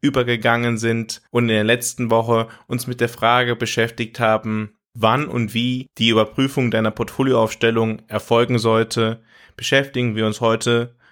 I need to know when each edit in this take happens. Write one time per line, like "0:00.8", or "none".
0:01.3